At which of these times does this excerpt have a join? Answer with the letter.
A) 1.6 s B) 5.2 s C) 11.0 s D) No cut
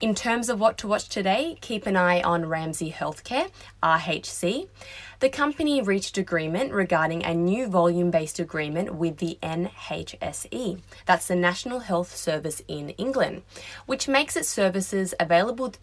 D